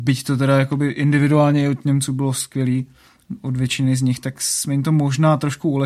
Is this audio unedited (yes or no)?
yes